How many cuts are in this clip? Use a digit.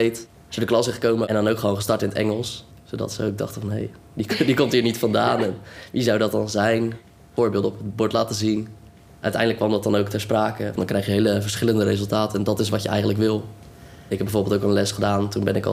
1